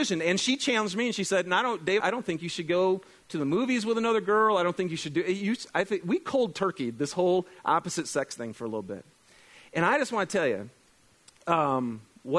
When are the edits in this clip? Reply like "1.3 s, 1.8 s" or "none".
2.0 s

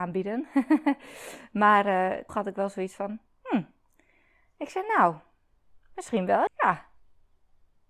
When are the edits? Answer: 2.3 s, 6.5 s

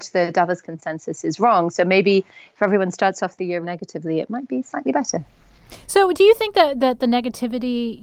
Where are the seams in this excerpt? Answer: 3.6 s

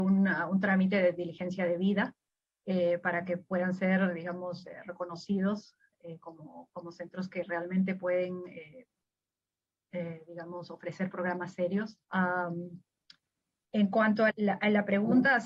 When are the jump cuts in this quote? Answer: 12.0 s, 14.3 s

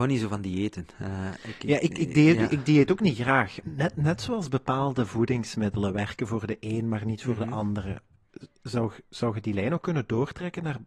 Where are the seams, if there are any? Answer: 3.6 s

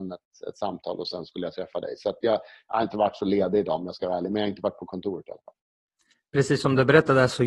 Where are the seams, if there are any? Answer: none

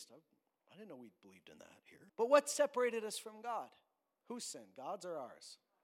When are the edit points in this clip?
2.1 s, 4.2 s

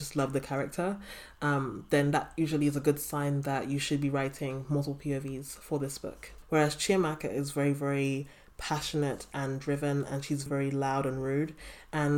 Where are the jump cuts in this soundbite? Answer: 6.4 s, 10.5 s

